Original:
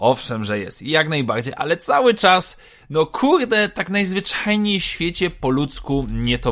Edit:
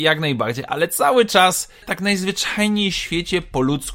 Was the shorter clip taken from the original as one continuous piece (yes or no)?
no